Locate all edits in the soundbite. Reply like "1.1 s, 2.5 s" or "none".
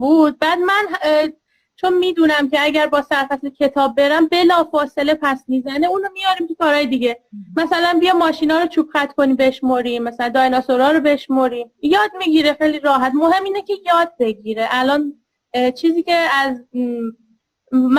11.7 s